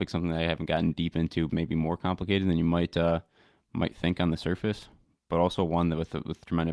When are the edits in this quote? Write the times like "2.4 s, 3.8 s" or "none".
1.5 s